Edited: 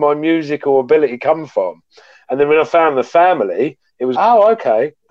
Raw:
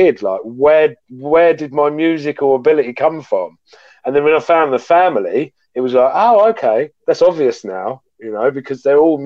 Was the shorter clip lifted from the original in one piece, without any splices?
no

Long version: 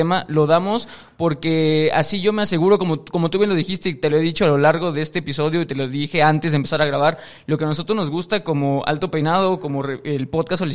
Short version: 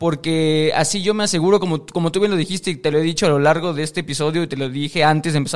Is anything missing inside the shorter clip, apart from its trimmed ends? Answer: no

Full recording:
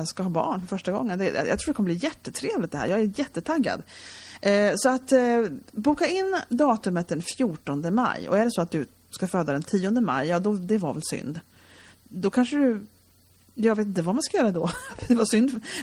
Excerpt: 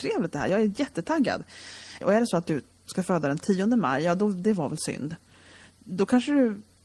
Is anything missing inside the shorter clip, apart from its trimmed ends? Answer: yes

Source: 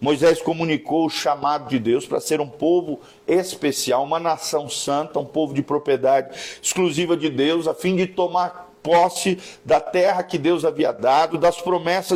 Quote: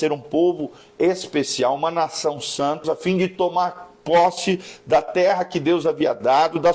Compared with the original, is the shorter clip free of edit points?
no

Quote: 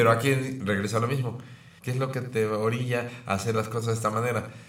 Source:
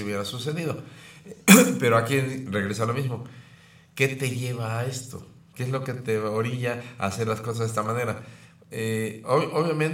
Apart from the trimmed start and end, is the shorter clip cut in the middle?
yes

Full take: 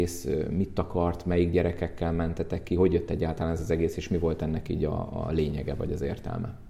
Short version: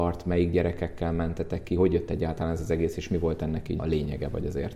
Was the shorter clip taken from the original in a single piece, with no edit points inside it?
no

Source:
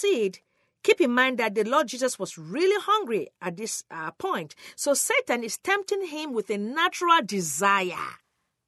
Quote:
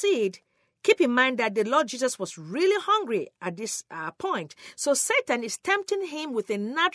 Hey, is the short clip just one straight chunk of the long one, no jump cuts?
yes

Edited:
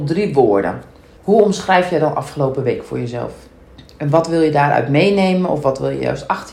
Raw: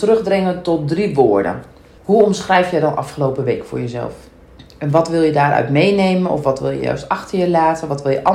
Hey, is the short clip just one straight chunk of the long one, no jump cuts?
yes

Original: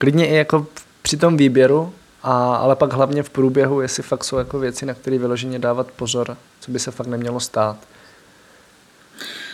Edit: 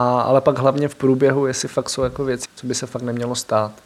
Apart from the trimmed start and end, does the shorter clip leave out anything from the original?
yes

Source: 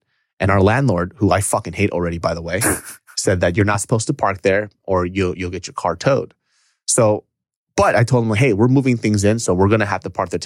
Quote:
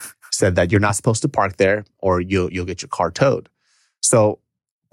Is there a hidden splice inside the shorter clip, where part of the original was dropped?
no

